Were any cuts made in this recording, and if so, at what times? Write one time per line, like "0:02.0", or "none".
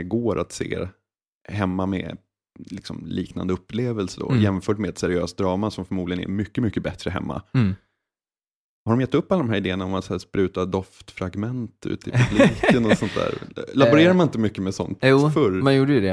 none